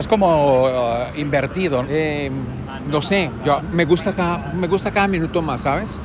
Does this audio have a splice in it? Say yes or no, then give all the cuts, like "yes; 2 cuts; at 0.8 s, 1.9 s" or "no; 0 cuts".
yes; 2 cuts; at 1.8 s, 3.6 s